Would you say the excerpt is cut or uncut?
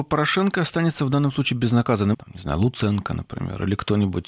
cut